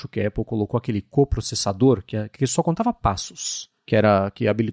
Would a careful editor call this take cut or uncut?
uncut